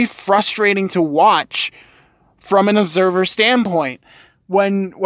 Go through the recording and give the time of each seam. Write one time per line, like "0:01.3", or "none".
none